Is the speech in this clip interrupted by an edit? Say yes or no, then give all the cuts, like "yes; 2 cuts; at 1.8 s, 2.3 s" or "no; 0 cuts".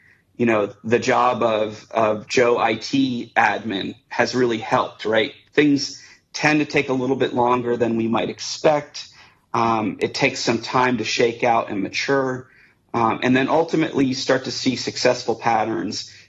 no; 0 cuts